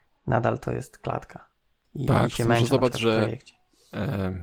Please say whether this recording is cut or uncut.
uncut